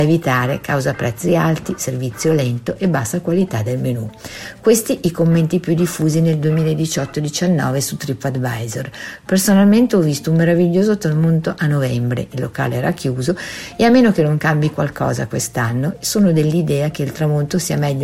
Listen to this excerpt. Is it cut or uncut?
uncut